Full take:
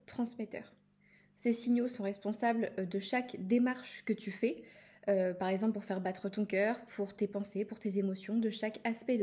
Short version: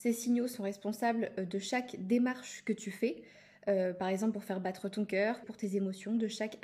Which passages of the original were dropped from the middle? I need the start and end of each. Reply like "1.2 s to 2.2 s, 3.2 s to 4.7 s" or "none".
6.8 s to 7.7 s